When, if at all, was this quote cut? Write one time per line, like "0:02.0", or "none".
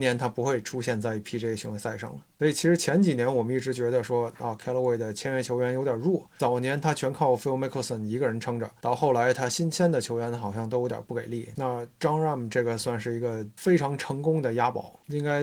0:02.3